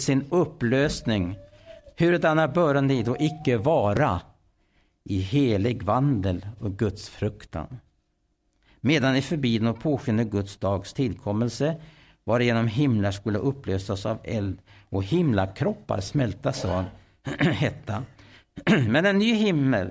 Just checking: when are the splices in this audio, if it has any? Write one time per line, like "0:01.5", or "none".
none